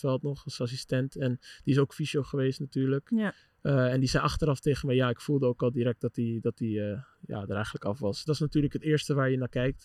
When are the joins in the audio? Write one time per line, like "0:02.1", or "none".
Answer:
0:08.3